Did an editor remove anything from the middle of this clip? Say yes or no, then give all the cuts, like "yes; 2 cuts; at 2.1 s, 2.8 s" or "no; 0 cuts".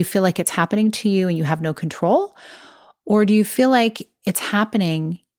no; 0 cuts